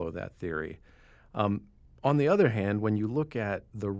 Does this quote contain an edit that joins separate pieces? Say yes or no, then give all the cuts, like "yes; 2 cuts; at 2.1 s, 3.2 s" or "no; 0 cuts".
no; 0 cuts